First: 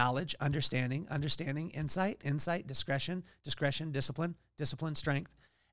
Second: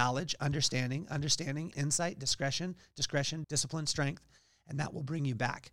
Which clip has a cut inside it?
second; 2 cuts; at 1.7 s, 3.4 s

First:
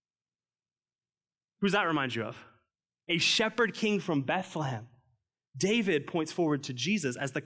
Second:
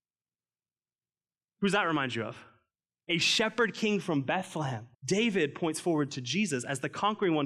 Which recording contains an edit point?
second; 1 cut; at 4.9 s

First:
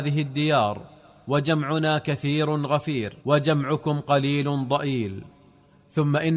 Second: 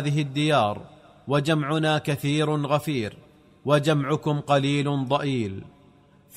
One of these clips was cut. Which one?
first; 1 cut; at 3.2 s

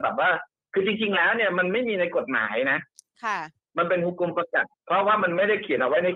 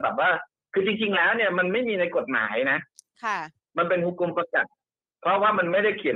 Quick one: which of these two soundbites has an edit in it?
first; 1 cut; at 4.7 s

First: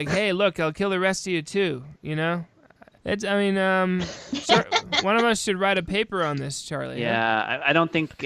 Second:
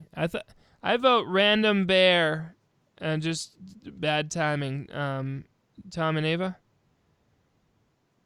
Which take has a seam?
first; 1 cut; at 3.0 s

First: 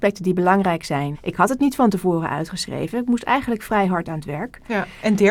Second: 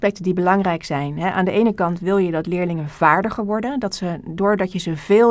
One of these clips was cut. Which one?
first; 1 cut; at 1.1 s

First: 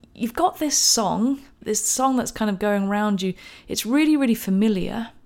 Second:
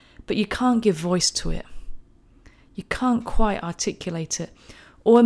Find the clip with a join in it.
first; 1 cut; at 1.6 s

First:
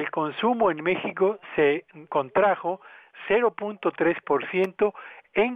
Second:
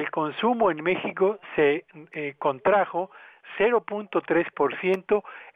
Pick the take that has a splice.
first; 1 cut; at 2.1 s

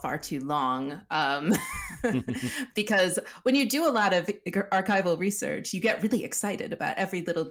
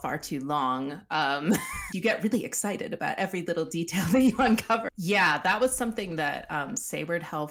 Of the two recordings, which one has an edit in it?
second; 2 cuts; at 1.9 s, 4.9 s

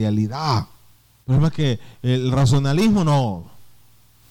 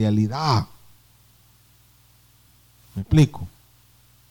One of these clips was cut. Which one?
first; 1 cut; at 1.2 s

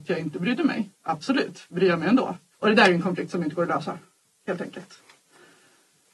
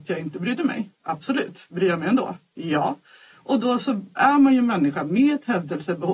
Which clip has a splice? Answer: first; 1 cut; at 2.5 s

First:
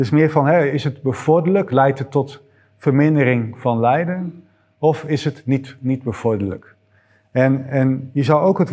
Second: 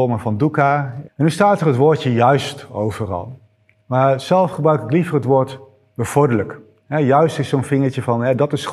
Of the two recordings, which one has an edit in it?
second; 2 cuts; at 1.1 s, 3.8 s

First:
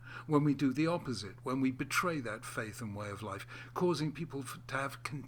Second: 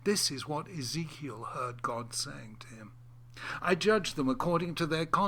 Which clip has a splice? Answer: second; 1 cut; at 3.6 s

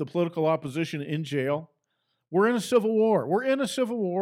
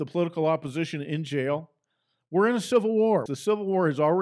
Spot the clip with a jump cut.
second; 1 cut; at 3.3 s

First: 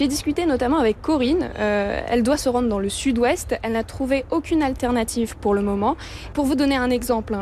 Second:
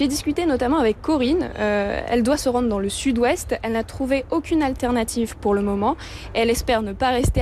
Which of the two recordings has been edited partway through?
first; 1 cut; at 6.3 s

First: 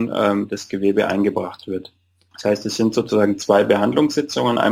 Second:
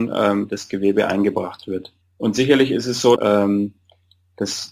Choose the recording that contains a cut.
second; 2 cuts; at 2.0 s, 3.2 s

